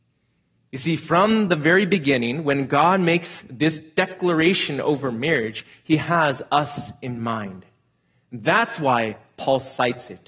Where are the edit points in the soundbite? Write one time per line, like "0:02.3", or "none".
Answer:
none